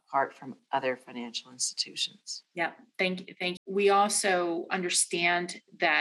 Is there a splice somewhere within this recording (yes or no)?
yes